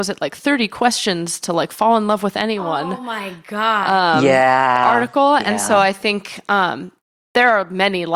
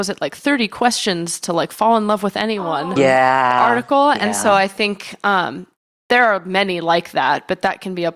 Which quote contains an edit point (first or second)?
second